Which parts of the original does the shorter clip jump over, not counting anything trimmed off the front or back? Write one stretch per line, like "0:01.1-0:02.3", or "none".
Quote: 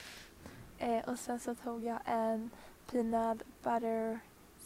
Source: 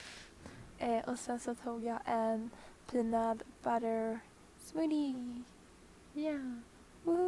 none